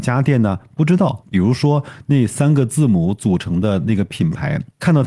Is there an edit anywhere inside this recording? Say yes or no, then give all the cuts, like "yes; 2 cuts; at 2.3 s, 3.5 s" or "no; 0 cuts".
yes; 1 cut; at 1.2 s